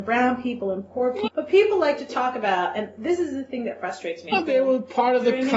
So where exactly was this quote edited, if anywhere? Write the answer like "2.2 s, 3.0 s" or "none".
1.3 s, 4.3 s